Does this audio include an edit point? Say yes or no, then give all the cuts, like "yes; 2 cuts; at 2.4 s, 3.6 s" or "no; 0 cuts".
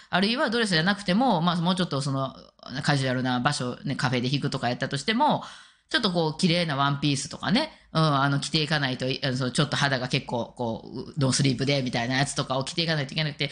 no; 0 cuts